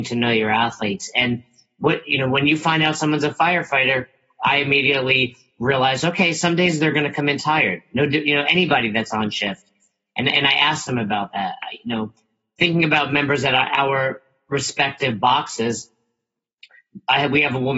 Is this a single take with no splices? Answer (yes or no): yes